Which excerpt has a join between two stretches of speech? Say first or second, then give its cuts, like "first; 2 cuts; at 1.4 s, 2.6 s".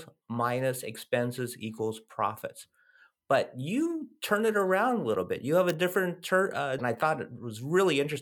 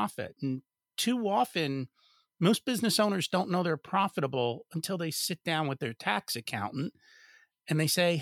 first; 1 cut; at 6.8 s